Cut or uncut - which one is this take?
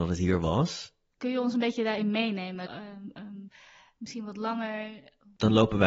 cut